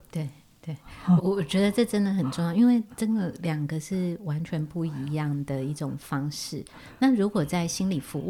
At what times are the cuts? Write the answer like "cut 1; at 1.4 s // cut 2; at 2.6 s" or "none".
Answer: cut 1; at 1.2 s